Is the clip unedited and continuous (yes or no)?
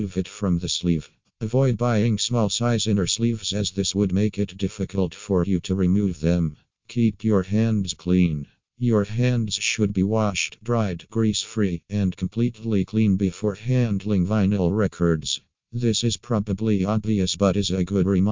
yes